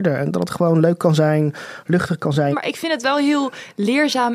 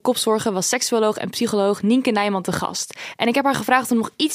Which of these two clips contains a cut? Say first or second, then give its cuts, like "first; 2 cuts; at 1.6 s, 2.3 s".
first; 1 cut; at 2.5 s